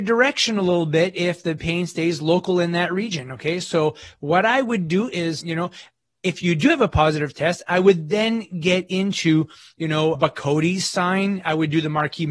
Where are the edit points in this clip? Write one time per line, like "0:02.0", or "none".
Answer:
0:05.4
0:10.1